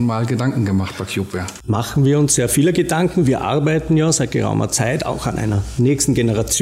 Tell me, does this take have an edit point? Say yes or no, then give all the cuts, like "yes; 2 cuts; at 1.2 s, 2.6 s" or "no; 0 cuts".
no; 0 cuts